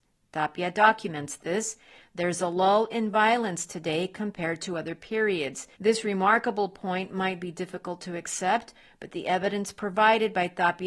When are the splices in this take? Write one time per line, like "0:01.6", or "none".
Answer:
0:05.7